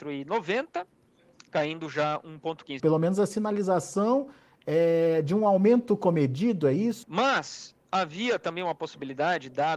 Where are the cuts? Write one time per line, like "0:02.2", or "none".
0:02.8
0:07.0